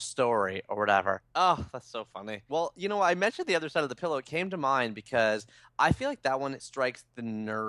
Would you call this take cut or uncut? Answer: cut